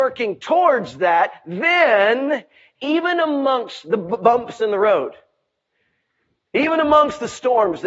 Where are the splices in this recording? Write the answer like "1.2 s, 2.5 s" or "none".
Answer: none